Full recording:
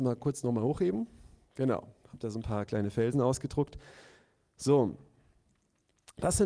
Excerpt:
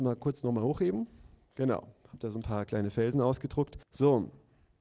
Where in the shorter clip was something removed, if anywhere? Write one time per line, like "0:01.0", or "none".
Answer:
0:03.8